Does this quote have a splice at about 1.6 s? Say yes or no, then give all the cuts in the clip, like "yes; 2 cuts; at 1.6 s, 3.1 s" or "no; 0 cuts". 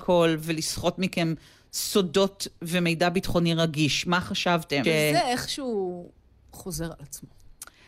no; 1 cut; at 4.8 s